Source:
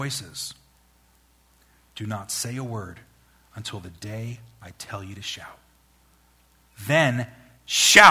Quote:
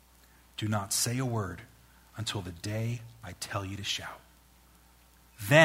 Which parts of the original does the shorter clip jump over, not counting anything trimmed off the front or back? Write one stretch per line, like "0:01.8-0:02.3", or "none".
none